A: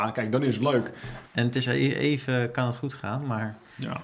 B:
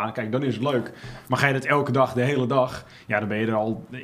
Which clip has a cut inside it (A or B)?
A